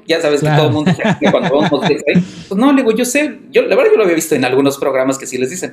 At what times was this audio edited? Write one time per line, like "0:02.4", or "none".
0:02.5